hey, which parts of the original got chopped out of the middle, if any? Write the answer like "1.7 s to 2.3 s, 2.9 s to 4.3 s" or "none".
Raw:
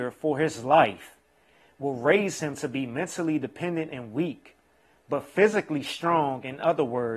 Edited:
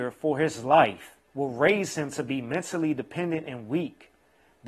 1.3 s to 1.7 s